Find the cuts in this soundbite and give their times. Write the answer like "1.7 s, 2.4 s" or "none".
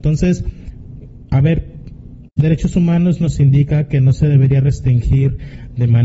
2.3 s

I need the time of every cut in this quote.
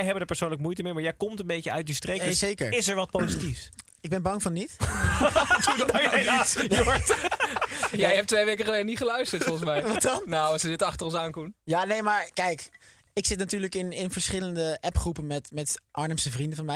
none

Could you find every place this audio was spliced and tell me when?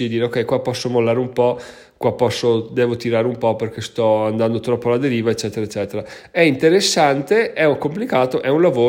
none

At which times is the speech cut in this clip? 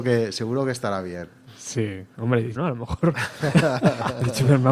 2.5 s

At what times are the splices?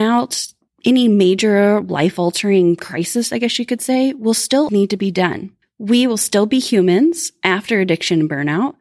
4.7 s

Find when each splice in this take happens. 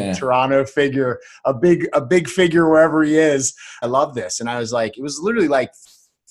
3.8 s

